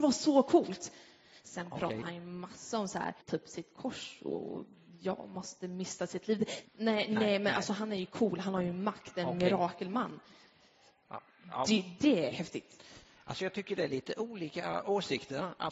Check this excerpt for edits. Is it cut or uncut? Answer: cut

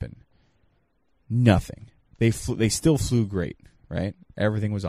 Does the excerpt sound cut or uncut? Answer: uncut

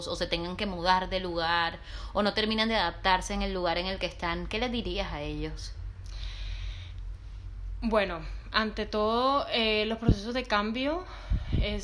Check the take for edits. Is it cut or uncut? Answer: uncut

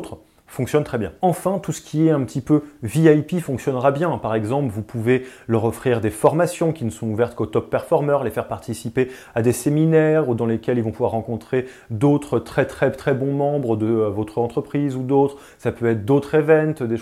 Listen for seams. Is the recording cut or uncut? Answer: uncut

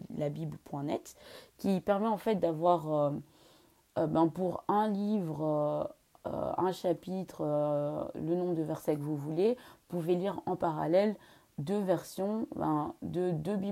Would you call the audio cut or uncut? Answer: uncut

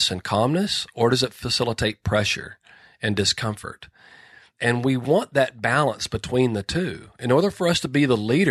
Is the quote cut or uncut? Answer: uncut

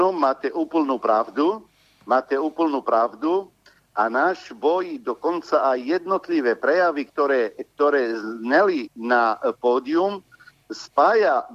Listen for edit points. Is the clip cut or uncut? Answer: uncut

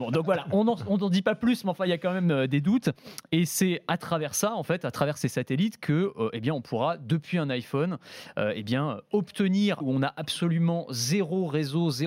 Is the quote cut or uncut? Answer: cut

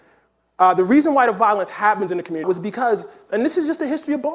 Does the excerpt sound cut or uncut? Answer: cut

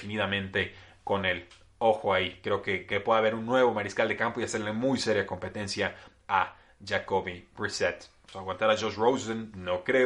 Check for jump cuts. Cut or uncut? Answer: cut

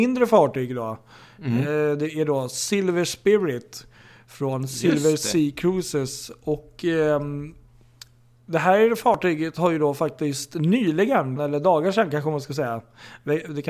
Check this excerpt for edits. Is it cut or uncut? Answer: cut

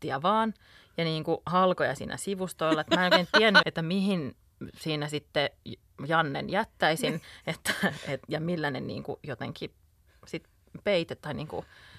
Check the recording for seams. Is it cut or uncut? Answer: cut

